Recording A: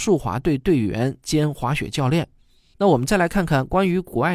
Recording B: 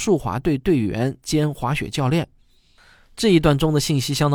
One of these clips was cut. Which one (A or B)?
A